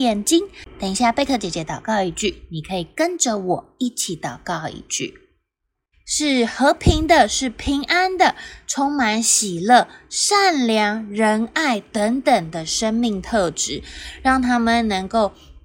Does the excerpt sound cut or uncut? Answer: cut